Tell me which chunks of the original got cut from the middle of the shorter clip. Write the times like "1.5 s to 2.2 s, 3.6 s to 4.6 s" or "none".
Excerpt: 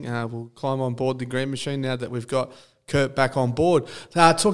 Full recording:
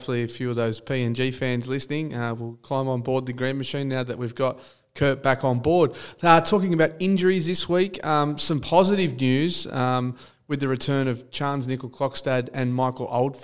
none

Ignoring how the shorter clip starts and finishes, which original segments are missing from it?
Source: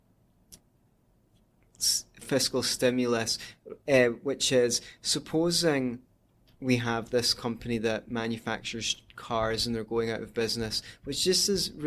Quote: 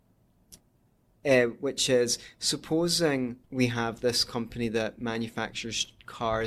1.2 s to 3.8 s, 6.1 s to 6.5 s

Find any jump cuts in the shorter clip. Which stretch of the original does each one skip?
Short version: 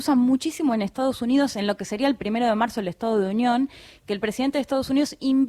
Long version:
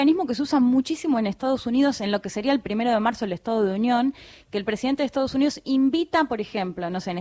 none

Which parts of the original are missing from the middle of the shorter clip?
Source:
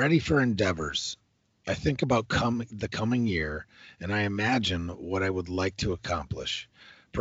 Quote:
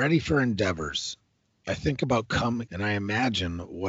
2.7 s to 4.0 s

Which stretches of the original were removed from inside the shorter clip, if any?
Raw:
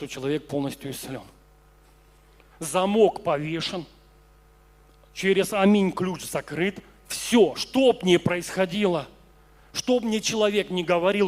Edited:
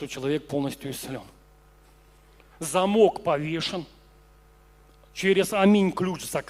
none

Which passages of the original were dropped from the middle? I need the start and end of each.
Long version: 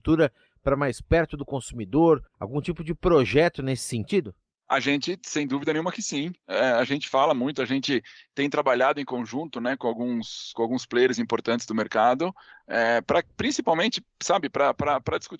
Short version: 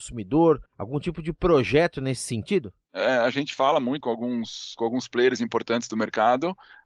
4.5 s to 6.4 s, 7.5 s to 9.8 s

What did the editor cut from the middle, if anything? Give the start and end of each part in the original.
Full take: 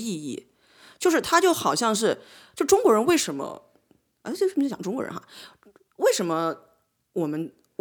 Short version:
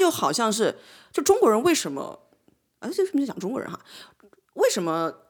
none

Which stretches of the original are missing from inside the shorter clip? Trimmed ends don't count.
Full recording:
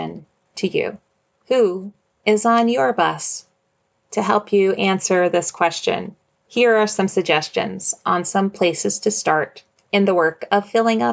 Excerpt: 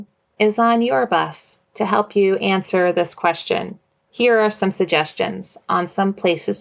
3.5 s to 4.0 s

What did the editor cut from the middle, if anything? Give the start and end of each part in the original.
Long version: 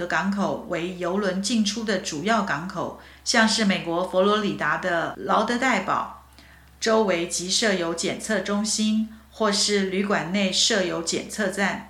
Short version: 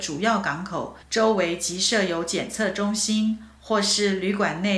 3.0 s to 6.7 s

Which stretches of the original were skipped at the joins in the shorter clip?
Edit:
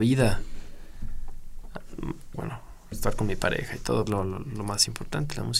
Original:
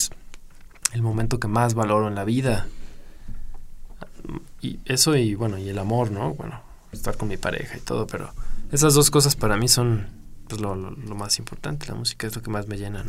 4.6 s to 6.4 s, 8.1 s to 10.6 s

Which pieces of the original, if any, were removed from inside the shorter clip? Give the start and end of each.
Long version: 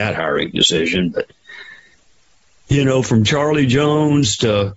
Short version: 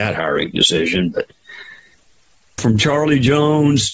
2.6 s to 3.0 s

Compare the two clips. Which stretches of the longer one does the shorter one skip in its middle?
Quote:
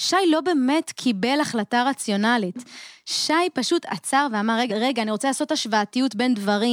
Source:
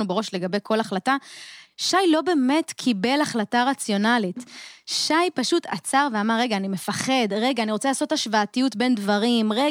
6.5 s to 7.3 s

